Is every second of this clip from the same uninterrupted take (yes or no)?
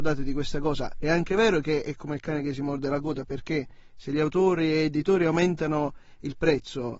yes